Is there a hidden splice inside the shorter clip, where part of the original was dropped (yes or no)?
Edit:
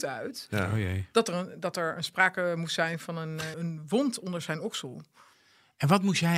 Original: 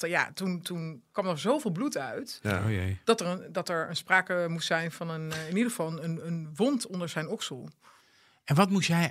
yes